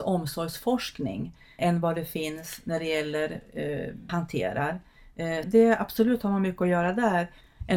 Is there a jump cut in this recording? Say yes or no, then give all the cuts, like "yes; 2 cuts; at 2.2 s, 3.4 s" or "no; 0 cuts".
yes; 3 cuts; at 1.6 s, 4.1 s, 5.4 s